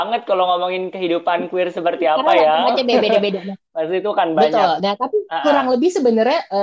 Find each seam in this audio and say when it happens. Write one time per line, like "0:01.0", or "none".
none